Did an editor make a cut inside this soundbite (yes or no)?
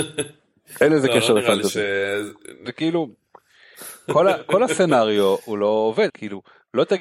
yes